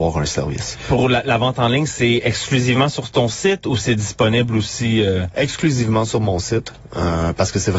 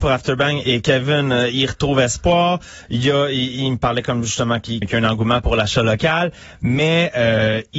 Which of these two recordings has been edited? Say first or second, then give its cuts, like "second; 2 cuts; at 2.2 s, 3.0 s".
second; 1 cut; at 4.8 s